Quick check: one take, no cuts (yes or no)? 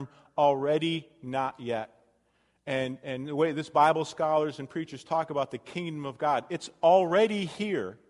yes